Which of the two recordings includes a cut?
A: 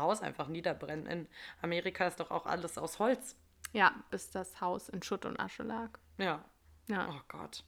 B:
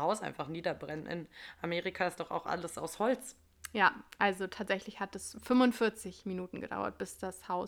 A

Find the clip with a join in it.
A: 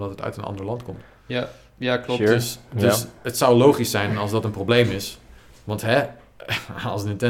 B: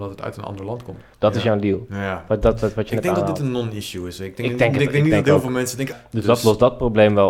B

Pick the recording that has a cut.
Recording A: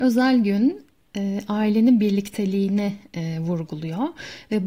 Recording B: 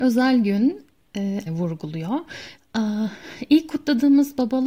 B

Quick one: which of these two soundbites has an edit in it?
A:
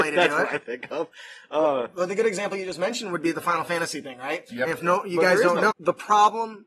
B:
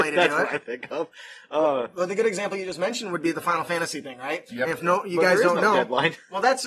A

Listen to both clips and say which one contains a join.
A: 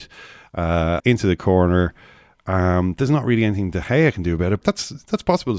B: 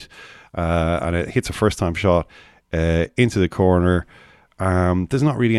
A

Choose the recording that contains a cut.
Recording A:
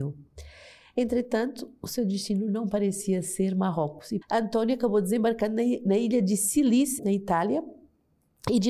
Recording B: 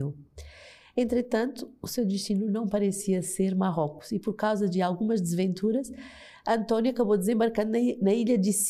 A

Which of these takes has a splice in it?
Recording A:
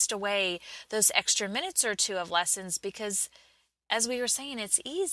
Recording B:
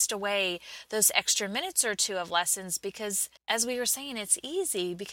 B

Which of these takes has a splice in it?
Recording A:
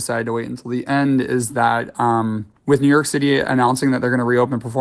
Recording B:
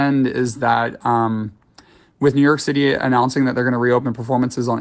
A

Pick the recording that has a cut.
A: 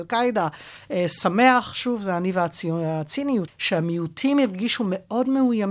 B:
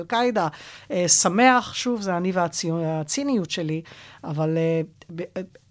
A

